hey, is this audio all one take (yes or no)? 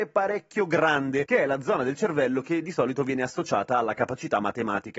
yes